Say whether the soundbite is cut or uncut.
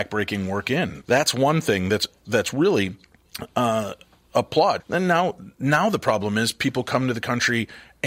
cut